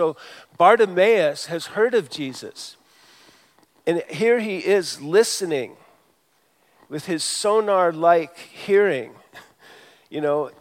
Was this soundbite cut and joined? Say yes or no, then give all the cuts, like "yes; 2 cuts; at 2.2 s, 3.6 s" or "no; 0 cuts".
no; 0 cuts